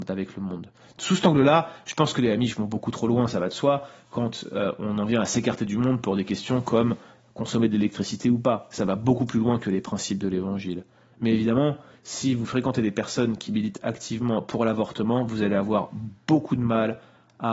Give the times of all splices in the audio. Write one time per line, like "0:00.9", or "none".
none